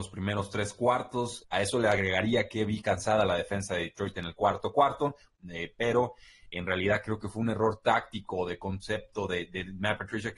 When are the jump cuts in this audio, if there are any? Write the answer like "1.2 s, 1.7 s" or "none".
1.4 s